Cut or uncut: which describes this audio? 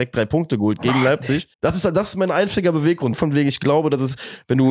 cut